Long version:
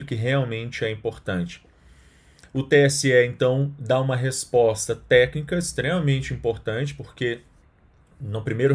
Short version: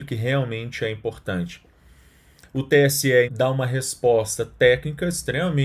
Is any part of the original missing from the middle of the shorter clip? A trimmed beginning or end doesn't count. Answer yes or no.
yes